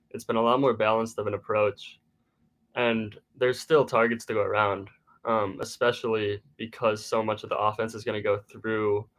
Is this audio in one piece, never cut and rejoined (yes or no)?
yes